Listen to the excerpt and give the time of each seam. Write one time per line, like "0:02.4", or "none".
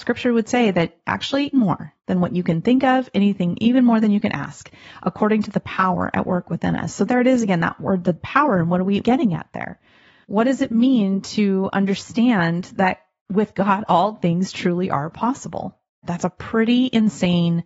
0:01.5
0:16.0